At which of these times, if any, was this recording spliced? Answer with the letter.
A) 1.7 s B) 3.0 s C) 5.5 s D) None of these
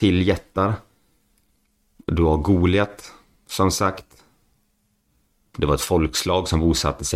C